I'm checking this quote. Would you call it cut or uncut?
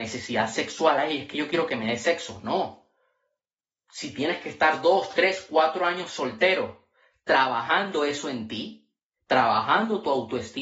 uncut